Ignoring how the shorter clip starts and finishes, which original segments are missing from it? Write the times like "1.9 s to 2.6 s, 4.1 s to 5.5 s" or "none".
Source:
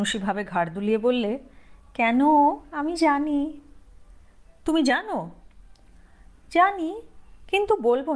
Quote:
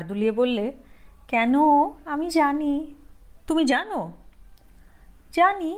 4.0 s to 4.6 s